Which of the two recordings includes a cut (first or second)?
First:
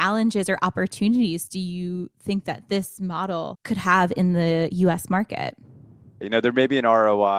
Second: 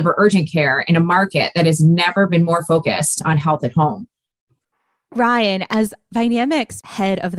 first